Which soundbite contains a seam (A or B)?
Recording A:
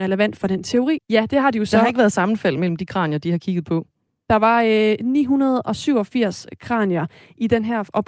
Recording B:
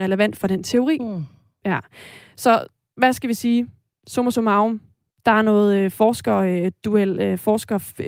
A